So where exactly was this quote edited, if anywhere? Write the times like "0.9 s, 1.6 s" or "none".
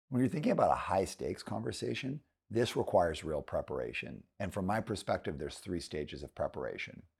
none